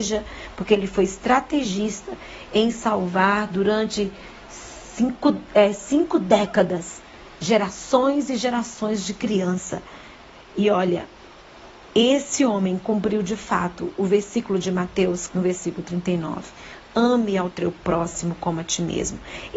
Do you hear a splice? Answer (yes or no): yes